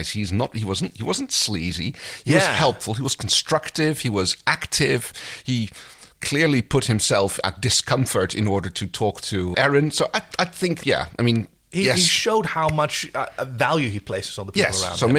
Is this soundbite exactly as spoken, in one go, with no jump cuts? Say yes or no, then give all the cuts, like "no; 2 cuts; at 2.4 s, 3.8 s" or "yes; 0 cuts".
yes; 0 cuts